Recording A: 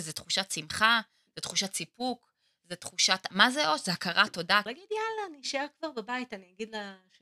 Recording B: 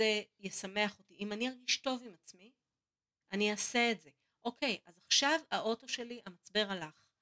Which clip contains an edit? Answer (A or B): A